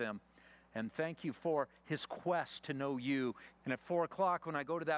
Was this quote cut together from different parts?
yes; 1 cut; at 3.6 s

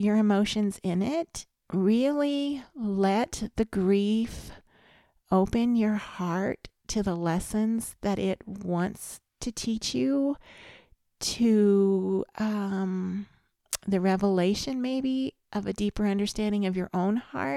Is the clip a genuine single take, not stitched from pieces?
no; 1 cut; at 1.6 s

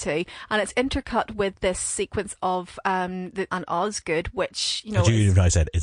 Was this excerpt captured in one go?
no; 1 cut; at 3.5 s

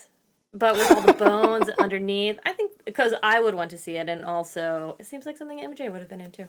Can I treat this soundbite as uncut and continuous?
yes; 0 cuts

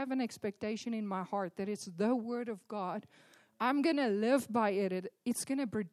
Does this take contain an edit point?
no; 0 cuts

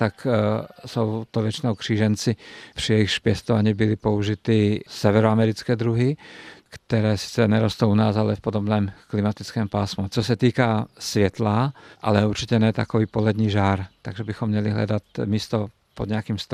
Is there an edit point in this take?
yes; 2 cuts; at 10.1 s, 11.9 s

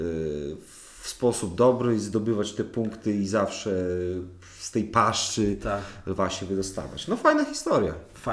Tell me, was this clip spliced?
no; 0 cuts

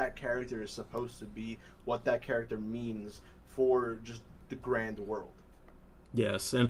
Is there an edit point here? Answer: no; 0 cuts

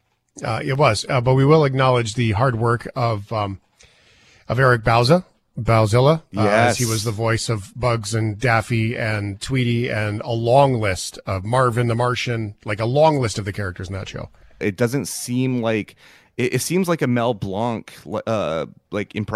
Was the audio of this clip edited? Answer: yes; 1 cut; at 14.6 s

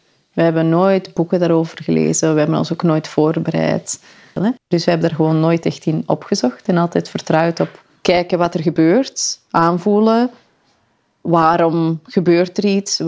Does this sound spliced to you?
yes; 1 cut; at 4.4 s

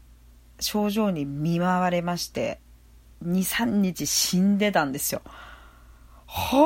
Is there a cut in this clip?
no; 0 cuts

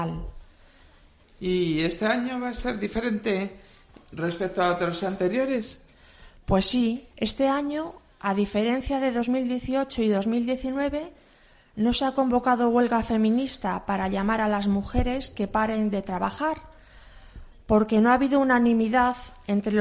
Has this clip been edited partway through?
yes; 2 cuts; at 1.2 s, 7.1 s

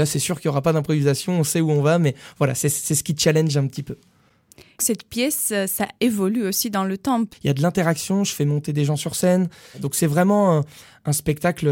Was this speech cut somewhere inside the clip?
yes; 2 cuts; at 4.8 s, 7.3 s

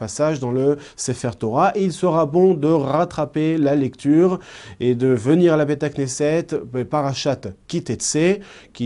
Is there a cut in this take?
no; 0 cuts

